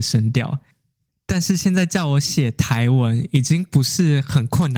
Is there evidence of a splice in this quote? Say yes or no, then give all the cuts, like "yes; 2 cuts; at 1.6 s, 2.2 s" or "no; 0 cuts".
yes; 1 cut; at 1.1 s